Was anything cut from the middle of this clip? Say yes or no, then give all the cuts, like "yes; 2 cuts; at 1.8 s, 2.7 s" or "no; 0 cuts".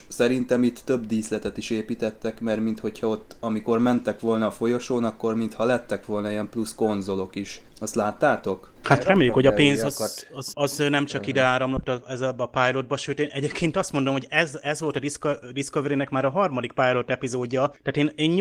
yes; 1 cut; at 10.5 s